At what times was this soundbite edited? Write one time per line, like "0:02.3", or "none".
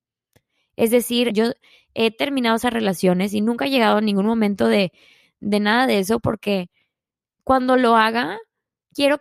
0:01.3